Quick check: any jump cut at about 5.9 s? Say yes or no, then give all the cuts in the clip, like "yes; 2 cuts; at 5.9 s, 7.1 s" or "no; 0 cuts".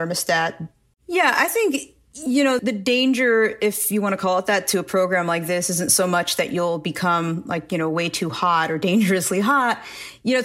no; 2 cuts; at 0.9 s, 2.6 s